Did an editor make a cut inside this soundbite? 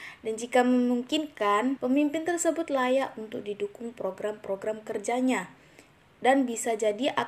yes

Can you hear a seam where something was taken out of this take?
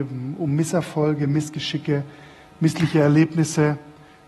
no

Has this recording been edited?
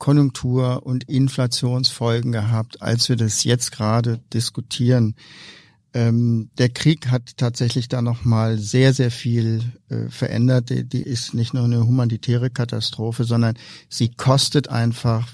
yes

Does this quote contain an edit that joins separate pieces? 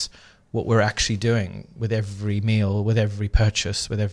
no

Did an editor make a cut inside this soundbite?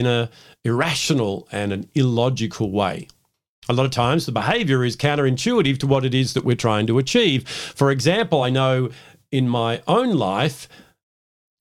no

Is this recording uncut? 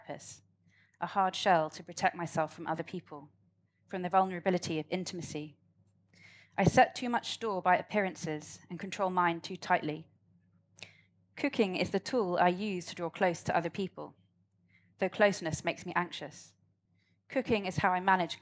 yes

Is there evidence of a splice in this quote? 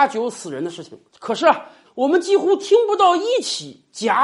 yes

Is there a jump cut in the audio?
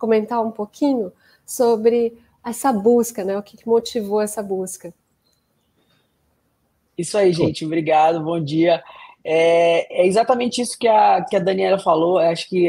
no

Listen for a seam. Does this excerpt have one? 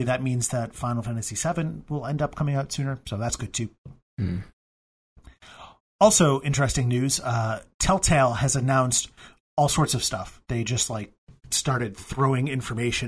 no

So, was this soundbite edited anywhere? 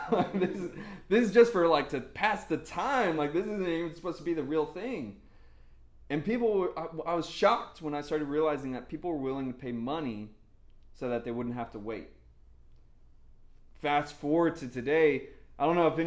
no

